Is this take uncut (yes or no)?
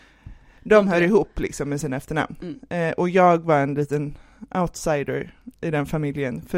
yes